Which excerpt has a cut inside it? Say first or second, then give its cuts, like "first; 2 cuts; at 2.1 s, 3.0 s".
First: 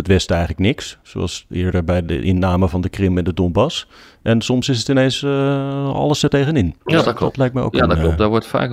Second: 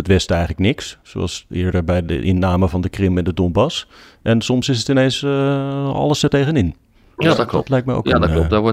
first; 1 cut; at 6.8 s